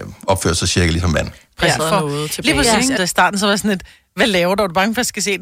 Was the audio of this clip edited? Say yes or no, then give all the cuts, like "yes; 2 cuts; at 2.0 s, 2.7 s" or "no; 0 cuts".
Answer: yes; 2 cuts; at 1.8 s, 3.0 s